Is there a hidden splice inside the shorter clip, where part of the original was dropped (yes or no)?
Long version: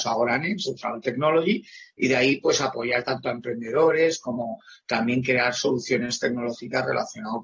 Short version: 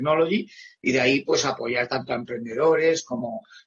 no